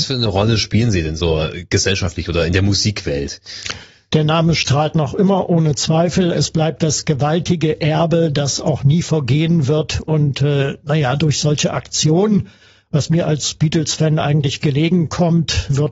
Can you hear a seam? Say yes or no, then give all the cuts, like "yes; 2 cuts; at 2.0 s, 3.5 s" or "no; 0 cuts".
no; 0 cuts